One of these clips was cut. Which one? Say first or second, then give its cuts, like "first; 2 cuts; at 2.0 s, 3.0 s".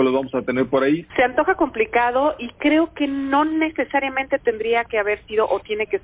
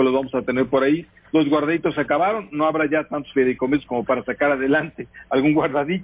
first; 1 cut; at 1.1 s